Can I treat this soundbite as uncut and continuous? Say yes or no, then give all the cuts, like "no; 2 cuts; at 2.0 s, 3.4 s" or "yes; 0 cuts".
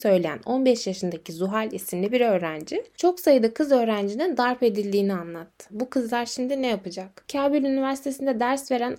no; 2 cuts; at 5.7 s, 7.2 s